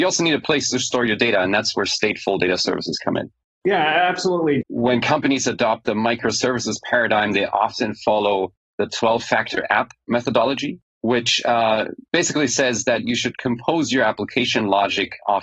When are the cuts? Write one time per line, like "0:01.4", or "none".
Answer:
0:04.6